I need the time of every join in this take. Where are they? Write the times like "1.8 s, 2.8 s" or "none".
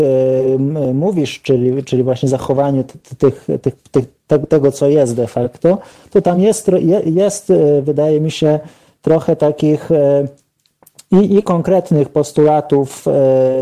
none